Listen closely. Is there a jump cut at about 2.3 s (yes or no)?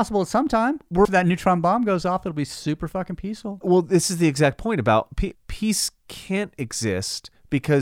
no